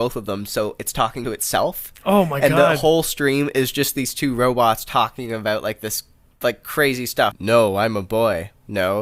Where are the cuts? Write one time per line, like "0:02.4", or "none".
0:07.3